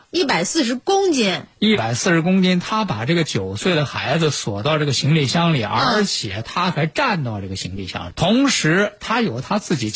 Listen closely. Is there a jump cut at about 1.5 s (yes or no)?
no